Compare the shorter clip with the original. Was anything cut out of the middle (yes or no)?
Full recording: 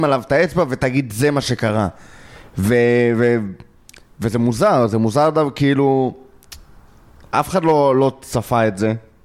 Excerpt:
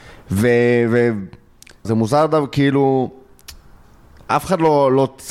yes